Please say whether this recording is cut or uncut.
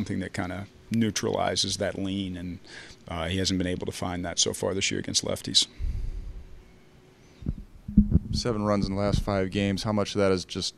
uncut